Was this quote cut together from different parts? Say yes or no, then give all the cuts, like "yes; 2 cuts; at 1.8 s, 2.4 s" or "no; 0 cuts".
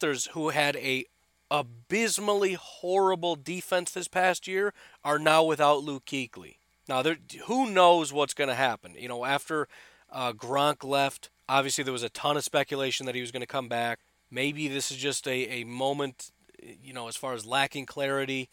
no; 0 cuts